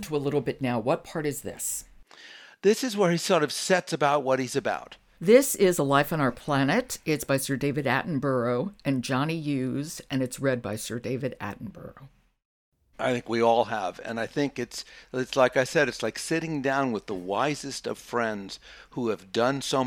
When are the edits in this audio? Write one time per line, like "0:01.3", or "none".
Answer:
0:05.2
0:12.9